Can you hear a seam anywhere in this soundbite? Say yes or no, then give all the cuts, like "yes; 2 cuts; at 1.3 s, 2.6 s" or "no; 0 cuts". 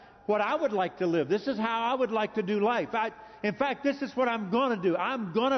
no; 0 cuts